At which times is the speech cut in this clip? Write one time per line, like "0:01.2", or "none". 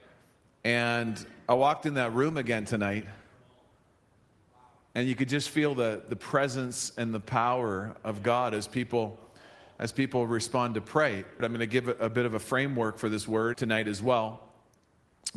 0:11.4
0:13.5